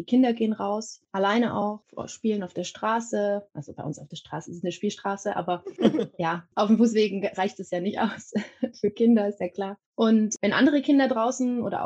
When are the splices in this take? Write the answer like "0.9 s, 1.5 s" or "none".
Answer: none